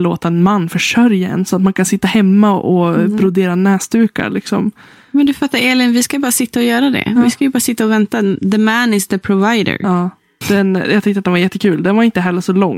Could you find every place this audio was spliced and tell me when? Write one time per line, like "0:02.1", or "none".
0:10.4

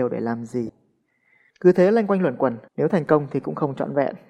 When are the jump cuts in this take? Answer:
0:01.5
0:02.7

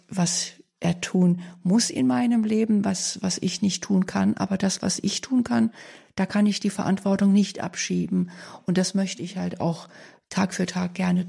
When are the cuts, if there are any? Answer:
none

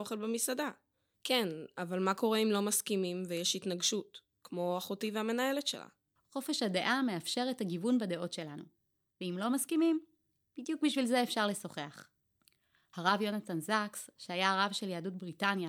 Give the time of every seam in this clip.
0:01.1

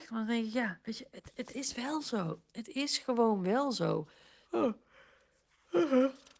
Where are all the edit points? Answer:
0:04.4

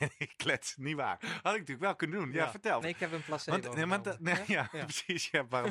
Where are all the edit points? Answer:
0:02.8

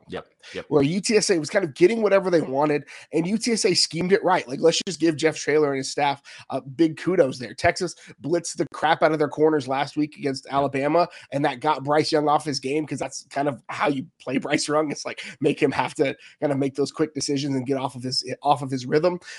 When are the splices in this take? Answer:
none

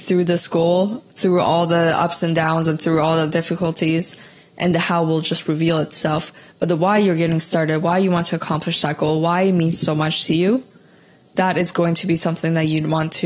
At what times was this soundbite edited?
none

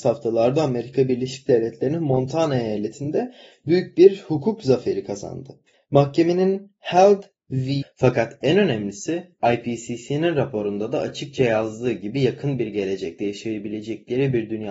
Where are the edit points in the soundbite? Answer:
0:05.7
0:07.8

